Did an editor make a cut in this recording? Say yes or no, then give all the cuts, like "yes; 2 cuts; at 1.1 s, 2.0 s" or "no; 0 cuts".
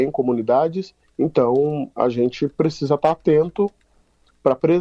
yes; 1 cut; at 1.0 s